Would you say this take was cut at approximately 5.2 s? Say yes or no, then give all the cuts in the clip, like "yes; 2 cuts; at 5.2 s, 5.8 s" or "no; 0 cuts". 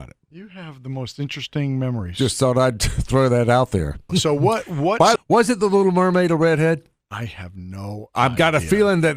yes; 2 cuts; at 4.1 s, 5.2 s